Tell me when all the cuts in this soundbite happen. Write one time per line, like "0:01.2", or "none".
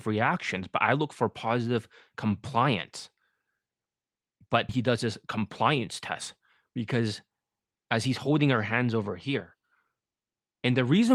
0:04.7